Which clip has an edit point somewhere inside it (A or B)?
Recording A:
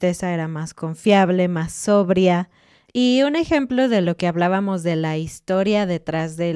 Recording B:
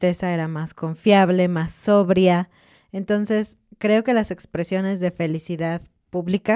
A